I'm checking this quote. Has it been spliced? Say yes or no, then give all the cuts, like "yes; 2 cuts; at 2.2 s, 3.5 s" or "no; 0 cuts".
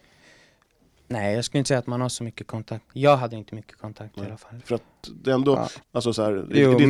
yes; 2 cuts; at 4.6 s, 5.8 s